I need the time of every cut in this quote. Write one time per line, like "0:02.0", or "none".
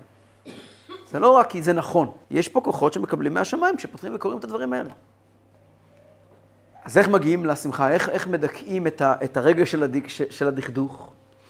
0:02.2
0:06.7